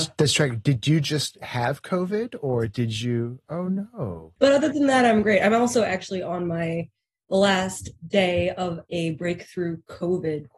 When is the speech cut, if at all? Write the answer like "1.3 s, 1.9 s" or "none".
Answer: 4.4 s